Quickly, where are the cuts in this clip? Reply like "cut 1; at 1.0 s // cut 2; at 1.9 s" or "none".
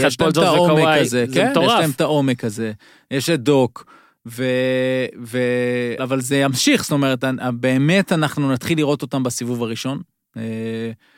cut 1; at 6.0 s